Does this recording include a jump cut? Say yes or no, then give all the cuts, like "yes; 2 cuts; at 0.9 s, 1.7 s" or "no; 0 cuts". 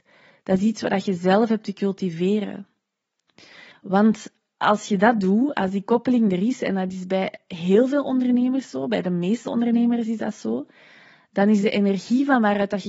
yes; 1 cut; at 3.7 s